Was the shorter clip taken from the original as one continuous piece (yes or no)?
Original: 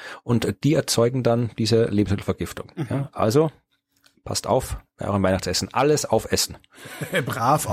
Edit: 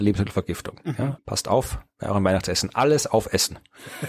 no